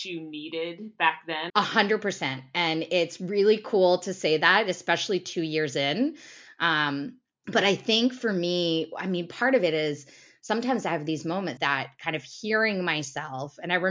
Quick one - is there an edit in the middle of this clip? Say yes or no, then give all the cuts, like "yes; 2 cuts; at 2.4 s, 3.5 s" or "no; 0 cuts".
yes; 2 cuts; at 1.5 s, 11.6 s